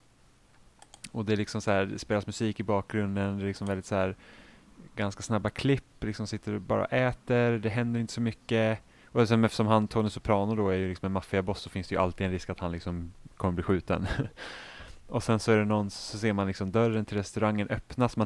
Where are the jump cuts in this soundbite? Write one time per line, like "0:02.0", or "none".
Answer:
none